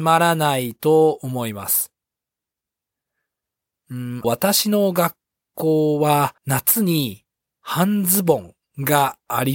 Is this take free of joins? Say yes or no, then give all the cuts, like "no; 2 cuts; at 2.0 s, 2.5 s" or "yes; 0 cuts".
no; 2 cuts; at 4.2 s, 6.4 s